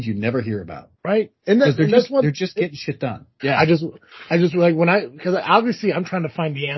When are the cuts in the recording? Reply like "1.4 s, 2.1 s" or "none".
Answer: 0.9 s, 3.4 s